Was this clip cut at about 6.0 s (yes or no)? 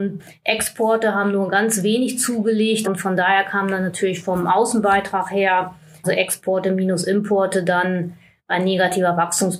yes